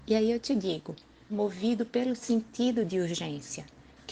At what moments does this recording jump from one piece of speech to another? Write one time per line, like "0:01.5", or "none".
0:01.3